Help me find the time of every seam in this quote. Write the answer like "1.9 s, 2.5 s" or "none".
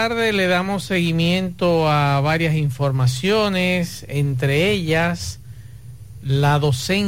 none